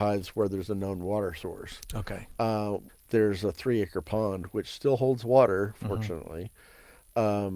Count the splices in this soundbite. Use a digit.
1